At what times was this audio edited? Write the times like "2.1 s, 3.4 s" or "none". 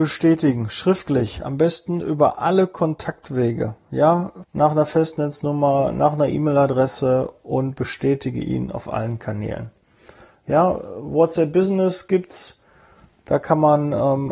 4.4 s